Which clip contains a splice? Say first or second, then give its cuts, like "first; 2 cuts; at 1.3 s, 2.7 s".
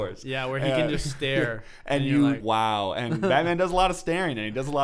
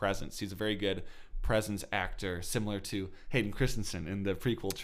first; 1 cut; at 2.4 s